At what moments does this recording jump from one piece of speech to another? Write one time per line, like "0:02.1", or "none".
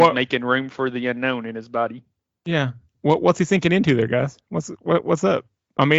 none